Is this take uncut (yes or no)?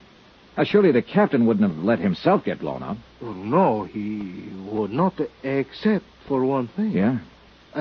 yes